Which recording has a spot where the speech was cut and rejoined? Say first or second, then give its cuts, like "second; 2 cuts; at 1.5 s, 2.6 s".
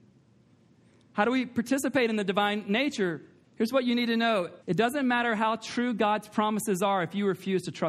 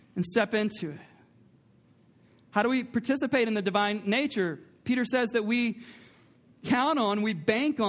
first; 2 cuts; at 3.4 s, 4.6 s